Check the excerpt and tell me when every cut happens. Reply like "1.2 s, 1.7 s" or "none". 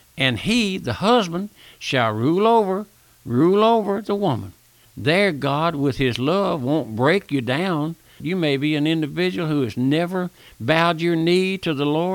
4.8 s, 8.2 s